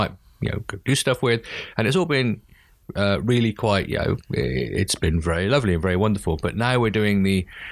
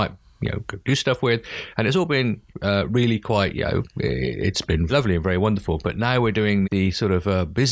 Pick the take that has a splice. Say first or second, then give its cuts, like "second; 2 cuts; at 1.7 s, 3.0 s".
second; 3 cuts; at 2.5 s, 4.9 s, 6.6 s